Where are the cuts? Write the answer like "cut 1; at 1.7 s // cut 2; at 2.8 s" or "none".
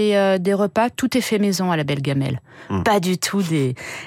cut 1; at 2.8 s